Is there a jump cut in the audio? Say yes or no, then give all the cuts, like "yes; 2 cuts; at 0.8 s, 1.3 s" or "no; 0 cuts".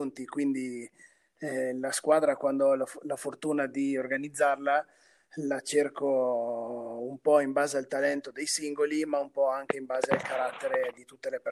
no; 0 cuts